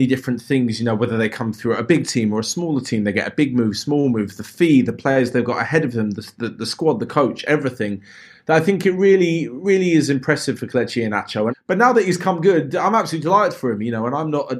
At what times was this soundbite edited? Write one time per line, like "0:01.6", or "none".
0:11.5